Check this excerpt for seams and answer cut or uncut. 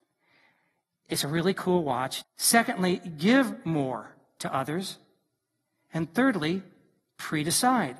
cut